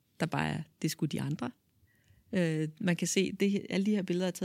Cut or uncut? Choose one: uncut